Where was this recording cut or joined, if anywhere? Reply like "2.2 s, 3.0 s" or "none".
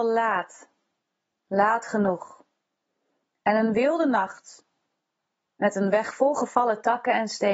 none